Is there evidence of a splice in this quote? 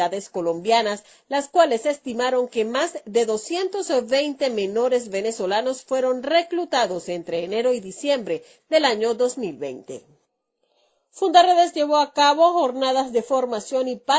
no; 0 cuts

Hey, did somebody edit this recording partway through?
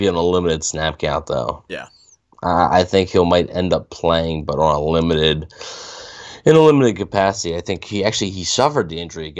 no; 0 cuts

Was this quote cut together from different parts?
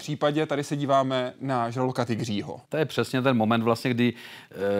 yes; 1 cut; at 2.6 s

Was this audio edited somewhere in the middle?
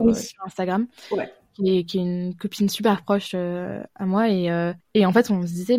no; 0 cuts

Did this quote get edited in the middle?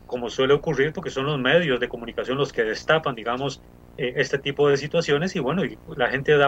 no; 0 cuts

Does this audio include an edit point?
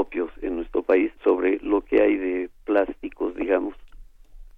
yes; 1 cut; at 1.2 s

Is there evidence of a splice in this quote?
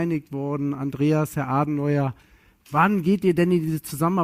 no; 0 cuts

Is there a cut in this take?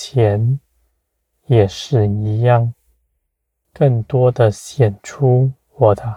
yes; 1 cut; at 3.6 s

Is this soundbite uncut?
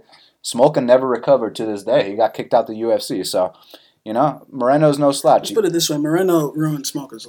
yes; 0 cuts

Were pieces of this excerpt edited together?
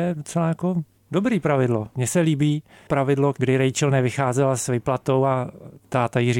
yes; 2 cuts; at 1.9 s, 3.3 s

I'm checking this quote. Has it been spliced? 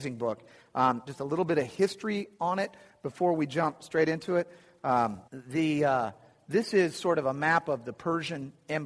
yes; 2 cuts; at 1.1 s, 5.3 s

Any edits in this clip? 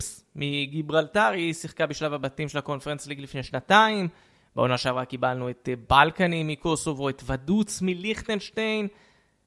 no; 0 cuts

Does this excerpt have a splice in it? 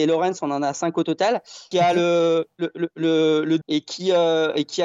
yes; 2 cuts; at 1.7 s, 3.6 s

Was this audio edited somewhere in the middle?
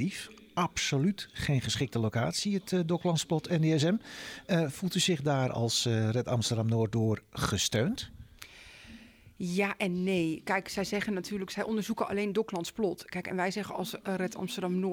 no; 0 cuts

